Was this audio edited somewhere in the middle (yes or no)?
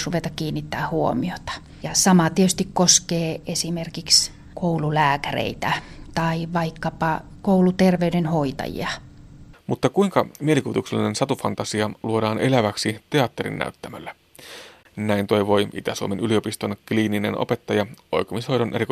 yes